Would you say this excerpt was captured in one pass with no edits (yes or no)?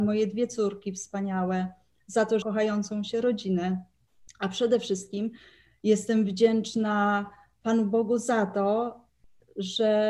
no